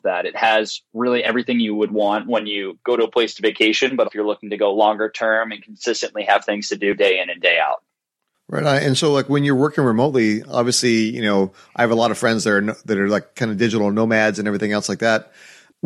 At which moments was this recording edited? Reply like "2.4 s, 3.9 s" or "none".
4.0 s